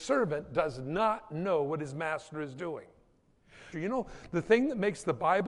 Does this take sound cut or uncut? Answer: cut